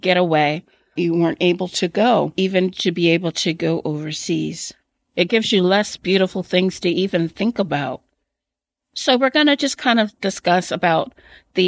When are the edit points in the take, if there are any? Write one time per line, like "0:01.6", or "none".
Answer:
0:01.0